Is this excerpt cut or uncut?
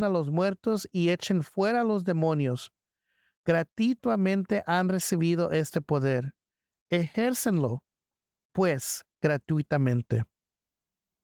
uncut